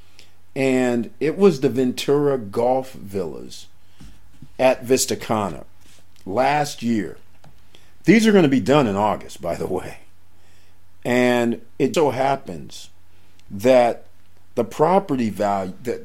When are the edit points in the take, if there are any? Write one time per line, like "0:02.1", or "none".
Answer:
0:11.9